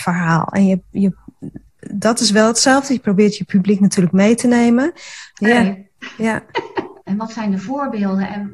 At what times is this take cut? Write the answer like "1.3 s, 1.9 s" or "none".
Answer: 5.3 s, 7.1 s